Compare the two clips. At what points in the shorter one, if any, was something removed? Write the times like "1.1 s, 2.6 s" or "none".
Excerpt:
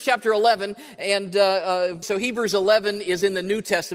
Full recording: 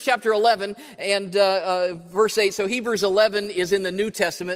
2.0 s